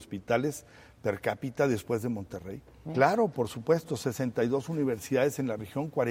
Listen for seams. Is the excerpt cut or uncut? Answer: cut